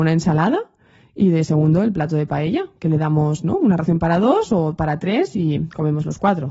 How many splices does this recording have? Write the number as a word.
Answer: zero